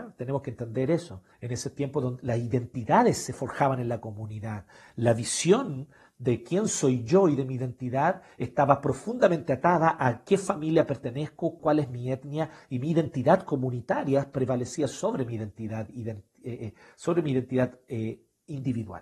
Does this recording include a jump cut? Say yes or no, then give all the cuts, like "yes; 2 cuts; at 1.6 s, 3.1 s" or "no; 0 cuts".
yes; 2 cuts; at 1.3 s, 11.6 s